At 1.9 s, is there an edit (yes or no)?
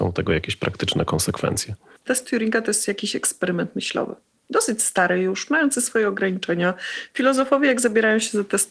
no